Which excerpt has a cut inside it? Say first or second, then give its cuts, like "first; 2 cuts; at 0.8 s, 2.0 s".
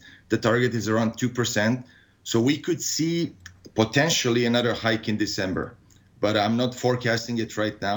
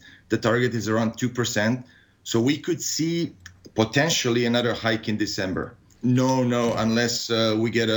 second; 1 cut; at 5.9 s